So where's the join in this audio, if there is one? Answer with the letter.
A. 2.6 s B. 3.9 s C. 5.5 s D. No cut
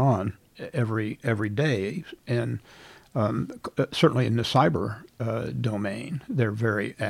D